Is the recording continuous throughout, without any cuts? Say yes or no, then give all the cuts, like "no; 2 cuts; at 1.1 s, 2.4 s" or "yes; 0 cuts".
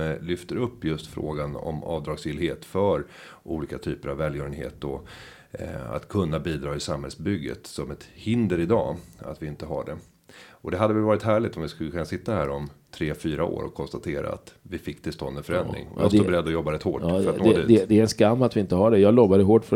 yes; 0 cuts